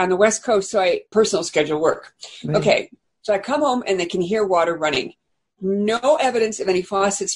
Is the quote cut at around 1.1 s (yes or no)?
yes